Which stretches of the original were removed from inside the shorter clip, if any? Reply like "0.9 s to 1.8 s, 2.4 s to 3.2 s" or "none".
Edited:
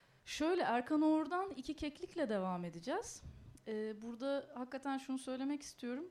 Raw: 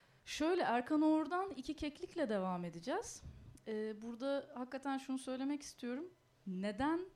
none